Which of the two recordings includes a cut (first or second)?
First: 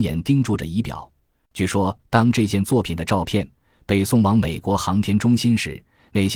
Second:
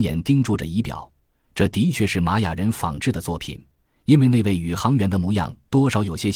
first